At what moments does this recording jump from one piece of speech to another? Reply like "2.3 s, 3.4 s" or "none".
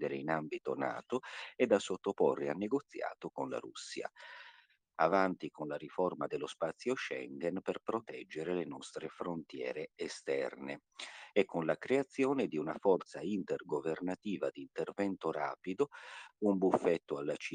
4.9 s, 16.3 s